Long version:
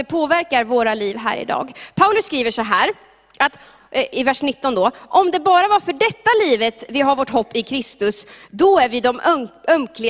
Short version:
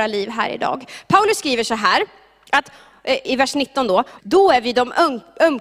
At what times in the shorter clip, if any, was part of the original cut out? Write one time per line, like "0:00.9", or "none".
0:04.2